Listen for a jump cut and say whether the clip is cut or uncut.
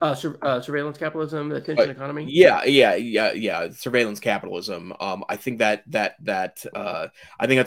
uncut